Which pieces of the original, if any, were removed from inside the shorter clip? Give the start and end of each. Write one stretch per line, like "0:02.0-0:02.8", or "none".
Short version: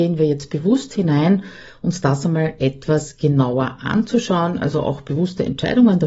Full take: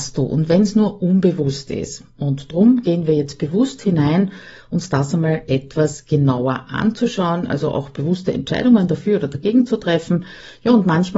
none